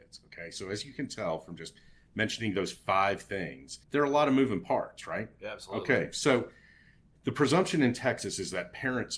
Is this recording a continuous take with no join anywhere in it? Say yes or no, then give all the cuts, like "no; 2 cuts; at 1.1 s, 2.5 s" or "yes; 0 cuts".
no; 1 cut; at 3.8 s